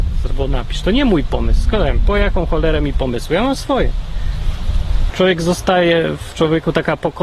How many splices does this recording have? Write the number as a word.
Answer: one